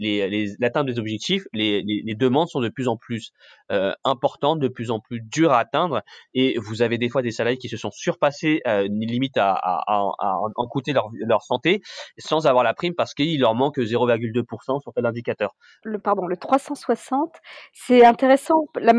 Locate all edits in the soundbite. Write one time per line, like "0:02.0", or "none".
0:15.8